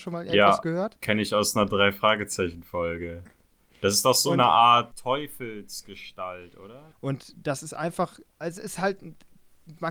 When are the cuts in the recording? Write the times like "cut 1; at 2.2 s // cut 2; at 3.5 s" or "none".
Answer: cut 1; at 4.9 s // cut 2; at 6.9 s